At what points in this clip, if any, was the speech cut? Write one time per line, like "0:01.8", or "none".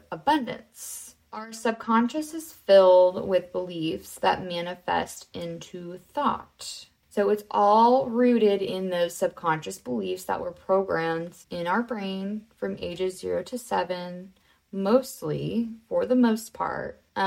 0:01.2
0:11.4